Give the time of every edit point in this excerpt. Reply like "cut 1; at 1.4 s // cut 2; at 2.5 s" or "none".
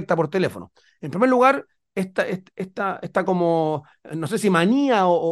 none